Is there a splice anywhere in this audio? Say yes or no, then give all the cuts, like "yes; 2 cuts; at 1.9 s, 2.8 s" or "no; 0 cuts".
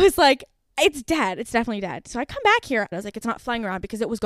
yes; 1 cut; at 2.9 s